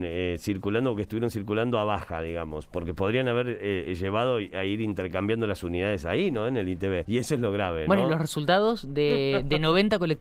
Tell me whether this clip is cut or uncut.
cut